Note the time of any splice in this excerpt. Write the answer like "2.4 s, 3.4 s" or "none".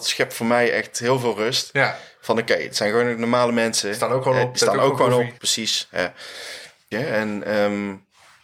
5.4 s, 6.9 s